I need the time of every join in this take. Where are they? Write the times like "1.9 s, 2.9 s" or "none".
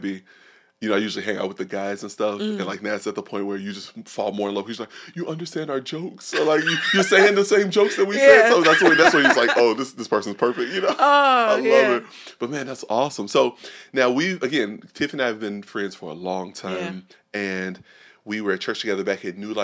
none